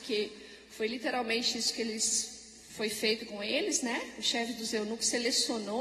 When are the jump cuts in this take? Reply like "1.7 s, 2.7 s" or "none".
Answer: none